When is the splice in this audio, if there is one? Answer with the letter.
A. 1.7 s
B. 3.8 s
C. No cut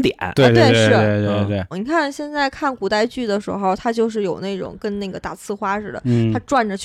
A